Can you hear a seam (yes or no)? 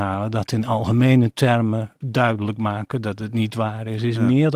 yes